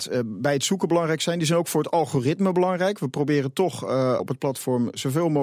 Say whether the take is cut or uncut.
cut